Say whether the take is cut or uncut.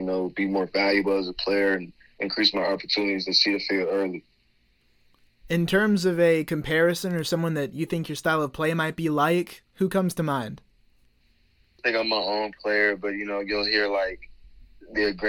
uncut